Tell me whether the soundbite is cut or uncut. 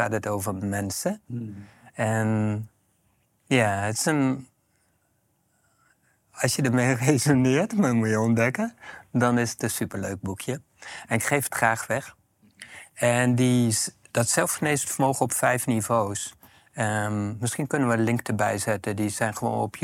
uncut